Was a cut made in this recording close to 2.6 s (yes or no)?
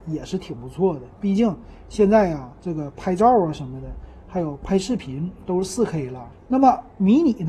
no